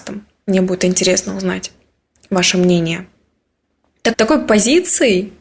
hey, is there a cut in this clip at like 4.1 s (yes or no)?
yes